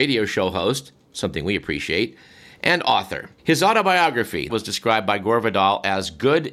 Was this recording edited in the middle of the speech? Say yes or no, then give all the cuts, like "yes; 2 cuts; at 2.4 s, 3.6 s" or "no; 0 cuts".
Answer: yes; 2 cuts; at 3.4 s, 4.5 s